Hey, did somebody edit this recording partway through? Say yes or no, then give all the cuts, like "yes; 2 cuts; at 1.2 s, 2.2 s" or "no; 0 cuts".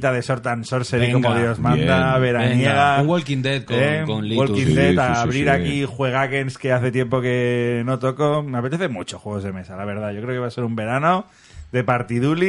no; 0 cuts